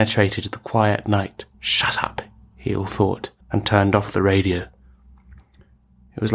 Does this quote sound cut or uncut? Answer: cut